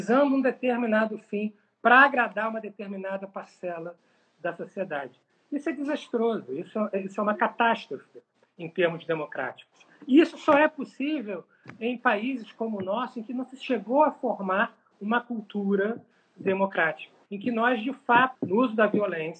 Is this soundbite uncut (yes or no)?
no